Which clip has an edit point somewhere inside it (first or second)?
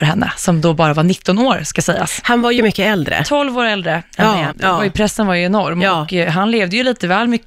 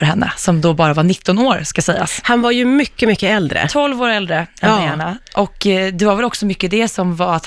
first